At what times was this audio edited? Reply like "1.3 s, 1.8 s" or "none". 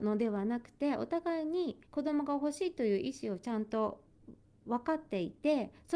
1.8 s